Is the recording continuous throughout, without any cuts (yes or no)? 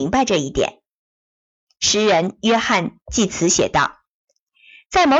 yes